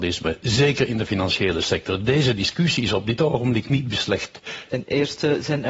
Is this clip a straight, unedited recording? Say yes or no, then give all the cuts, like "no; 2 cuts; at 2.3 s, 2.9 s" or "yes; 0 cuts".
no; 1 cut; at 4.7 s